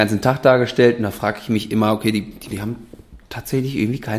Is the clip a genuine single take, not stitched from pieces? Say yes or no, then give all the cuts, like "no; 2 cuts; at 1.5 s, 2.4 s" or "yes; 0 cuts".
no; 1 cut; at 2.5 s